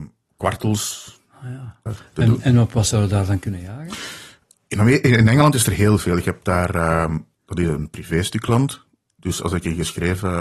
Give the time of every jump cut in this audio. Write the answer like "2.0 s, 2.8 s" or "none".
1.9 s, 7.3 s